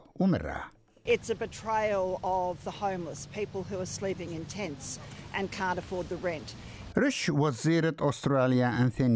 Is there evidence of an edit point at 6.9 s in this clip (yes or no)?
yes